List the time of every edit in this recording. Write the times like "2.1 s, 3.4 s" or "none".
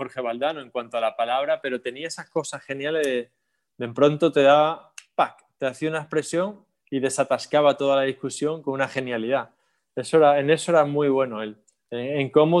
none